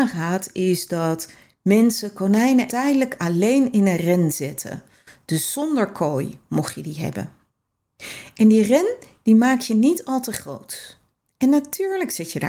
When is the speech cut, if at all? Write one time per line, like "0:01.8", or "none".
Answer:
0:02.7